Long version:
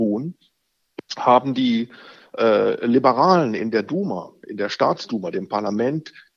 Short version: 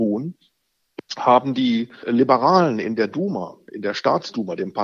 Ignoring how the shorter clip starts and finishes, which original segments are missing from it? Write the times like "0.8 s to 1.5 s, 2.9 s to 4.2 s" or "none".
2.0 s to 2.8 s